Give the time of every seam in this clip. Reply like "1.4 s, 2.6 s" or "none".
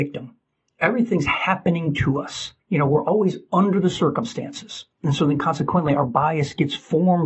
2.6 s